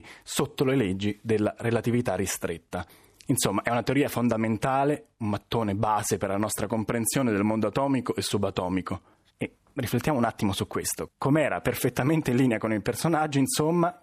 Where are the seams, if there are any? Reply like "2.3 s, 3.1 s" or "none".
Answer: 9.3 s